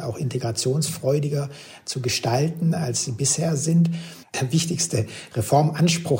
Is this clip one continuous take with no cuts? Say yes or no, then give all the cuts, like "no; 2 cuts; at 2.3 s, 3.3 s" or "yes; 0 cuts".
no; 1 cut; at 4.2 s